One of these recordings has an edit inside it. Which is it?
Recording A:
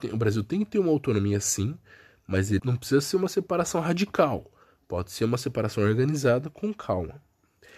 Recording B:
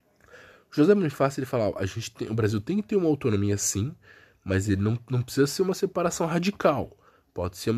A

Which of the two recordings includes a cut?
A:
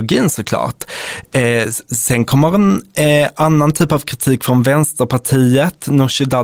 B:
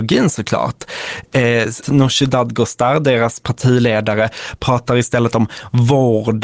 B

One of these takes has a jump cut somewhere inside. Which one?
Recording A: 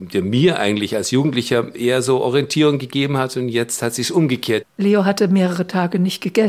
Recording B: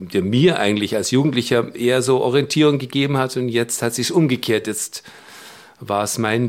A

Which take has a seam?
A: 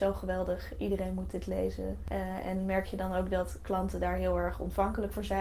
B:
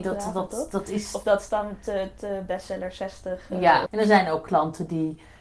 B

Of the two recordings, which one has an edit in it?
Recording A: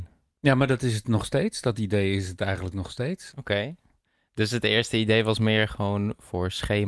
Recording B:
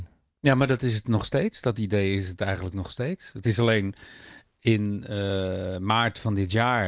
A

